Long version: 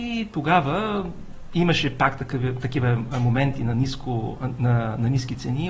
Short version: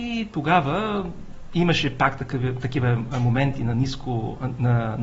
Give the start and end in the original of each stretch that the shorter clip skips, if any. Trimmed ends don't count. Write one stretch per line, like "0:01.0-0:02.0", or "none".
none